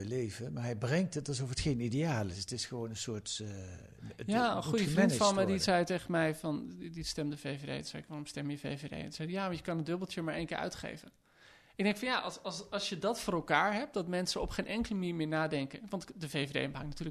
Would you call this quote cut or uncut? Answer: uncut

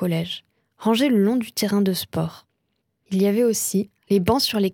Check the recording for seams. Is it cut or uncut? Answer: cut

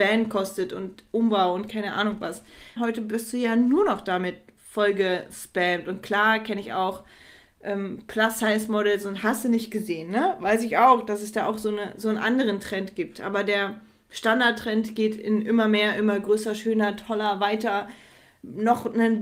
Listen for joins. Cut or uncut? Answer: cut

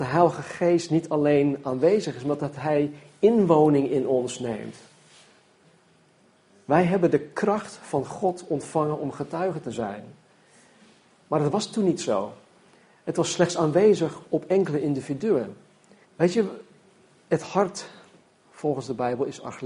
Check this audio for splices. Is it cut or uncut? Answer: cut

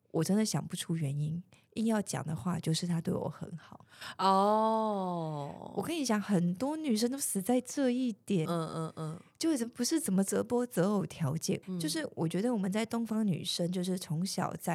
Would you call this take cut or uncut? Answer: cut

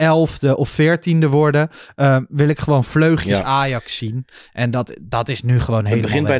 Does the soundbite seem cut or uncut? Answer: uncut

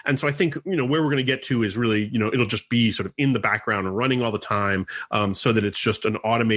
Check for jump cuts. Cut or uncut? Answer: uncut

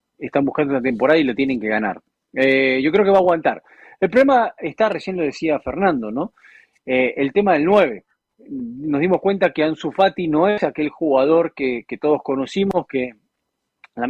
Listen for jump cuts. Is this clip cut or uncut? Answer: uncut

